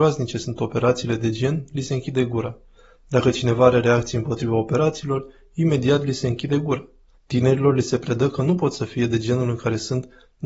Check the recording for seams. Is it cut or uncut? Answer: cut